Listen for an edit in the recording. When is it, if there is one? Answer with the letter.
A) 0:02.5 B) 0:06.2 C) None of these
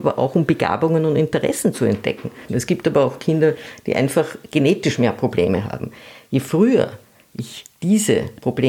A